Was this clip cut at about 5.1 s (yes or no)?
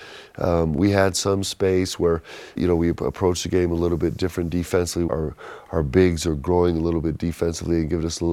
yes